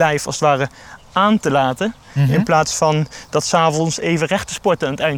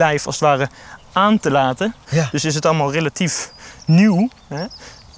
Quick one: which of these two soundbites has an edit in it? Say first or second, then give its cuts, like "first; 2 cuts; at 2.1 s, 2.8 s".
second; 1 cut; at 2.0 s